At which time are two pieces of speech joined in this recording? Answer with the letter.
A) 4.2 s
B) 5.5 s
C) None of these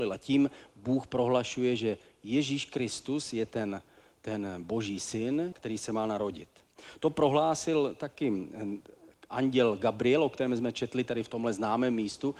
B